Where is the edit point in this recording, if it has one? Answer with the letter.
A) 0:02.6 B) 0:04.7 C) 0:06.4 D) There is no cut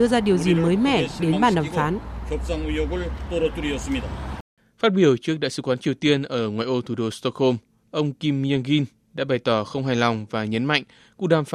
D